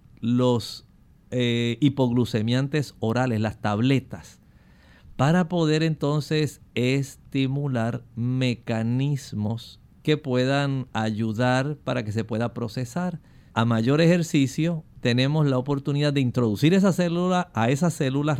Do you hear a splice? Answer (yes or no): yes